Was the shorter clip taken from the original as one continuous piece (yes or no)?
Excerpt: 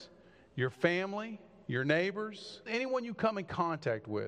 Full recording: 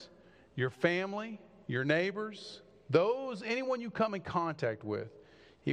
no